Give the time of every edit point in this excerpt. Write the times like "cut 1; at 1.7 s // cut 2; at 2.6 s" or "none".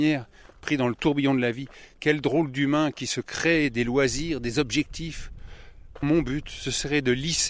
cut 1; at 6.0 s